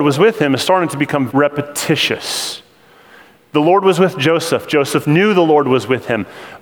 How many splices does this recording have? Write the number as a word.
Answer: one